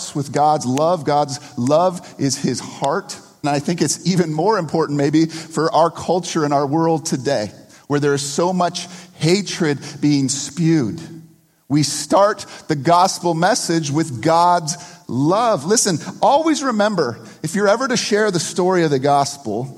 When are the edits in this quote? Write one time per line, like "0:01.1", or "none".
0:03.4